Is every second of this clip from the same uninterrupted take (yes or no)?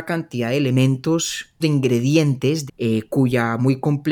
no